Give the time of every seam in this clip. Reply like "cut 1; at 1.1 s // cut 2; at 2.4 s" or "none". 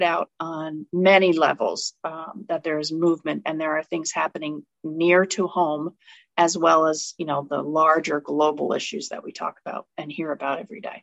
none